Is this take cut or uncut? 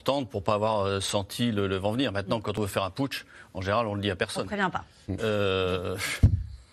uncut